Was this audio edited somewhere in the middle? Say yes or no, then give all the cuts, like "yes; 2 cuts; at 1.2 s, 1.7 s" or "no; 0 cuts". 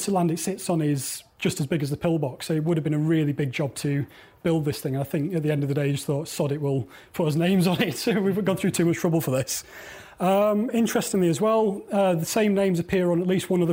no; 0 cuts